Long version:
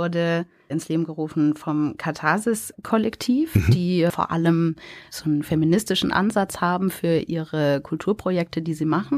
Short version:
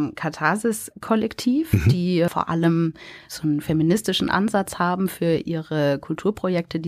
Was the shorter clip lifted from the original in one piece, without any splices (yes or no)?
yes